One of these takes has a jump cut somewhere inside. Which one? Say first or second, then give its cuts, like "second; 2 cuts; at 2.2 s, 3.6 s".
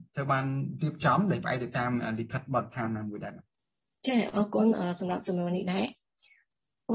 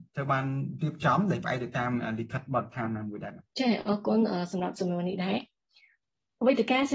second; 1 cut; at 3.5 s